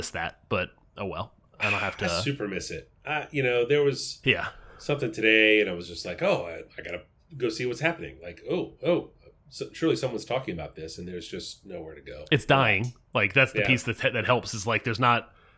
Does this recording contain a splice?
no; 0 cuts

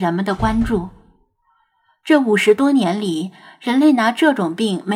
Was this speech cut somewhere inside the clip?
no; 0 cuts

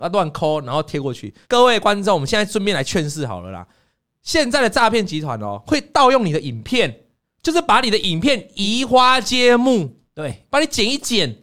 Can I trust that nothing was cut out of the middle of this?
no; 2 cuts; at 1.4 s, 10.5 s

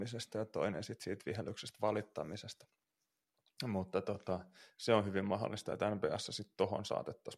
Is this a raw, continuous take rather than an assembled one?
yes; 0 cuts

